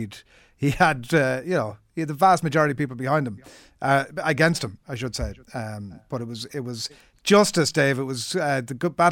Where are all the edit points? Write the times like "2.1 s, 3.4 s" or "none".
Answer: none